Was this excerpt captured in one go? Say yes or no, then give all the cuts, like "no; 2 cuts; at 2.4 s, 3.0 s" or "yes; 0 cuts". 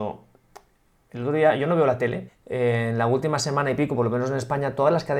no; 1 cut; at 2.3 s